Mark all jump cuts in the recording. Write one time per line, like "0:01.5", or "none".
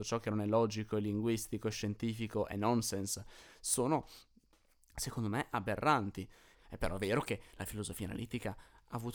0:06.5